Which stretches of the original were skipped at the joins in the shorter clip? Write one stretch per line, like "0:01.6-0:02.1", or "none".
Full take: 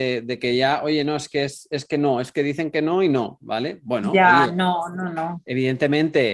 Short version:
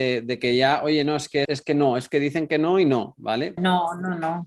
0:01.4-0:01.7
0:03.8-0:04.5